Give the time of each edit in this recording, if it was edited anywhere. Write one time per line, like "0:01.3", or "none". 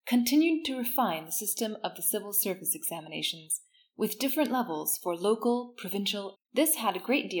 0:06.3